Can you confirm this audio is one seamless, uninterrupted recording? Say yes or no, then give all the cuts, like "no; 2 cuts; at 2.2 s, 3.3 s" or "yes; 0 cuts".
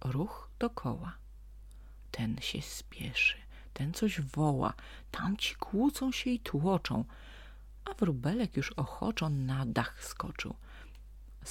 yes; 0 cuts